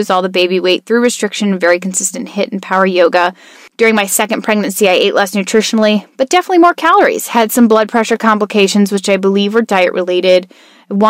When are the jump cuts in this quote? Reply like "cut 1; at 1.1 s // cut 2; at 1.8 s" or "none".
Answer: none